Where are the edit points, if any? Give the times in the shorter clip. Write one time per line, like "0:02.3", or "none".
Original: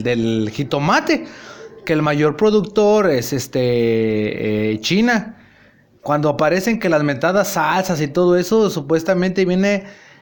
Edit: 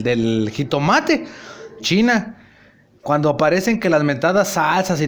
0:01.8